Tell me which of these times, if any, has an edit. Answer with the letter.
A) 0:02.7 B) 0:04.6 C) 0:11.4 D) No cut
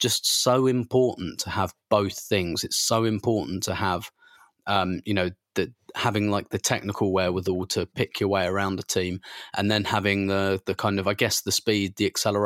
D